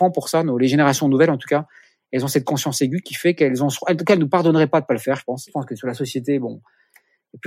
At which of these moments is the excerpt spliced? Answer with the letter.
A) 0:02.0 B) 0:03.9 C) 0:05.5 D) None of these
C